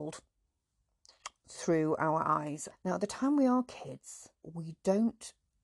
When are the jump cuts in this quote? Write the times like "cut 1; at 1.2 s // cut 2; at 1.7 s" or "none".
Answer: cut 1; at 2.7 s // cut 2; at 4.3 s